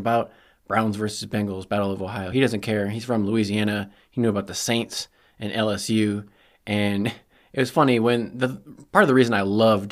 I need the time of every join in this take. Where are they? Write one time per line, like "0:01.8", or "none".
none